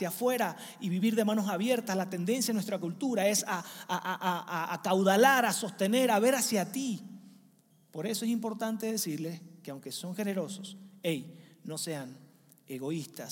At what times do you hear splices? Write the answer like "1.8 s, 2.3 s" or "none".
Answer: none